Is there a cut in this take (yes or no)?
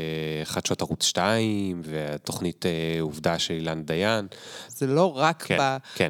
yes